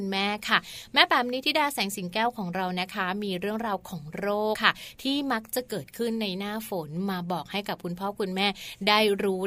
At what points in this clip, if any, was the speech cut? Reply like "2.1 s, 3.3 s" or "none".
4.5 s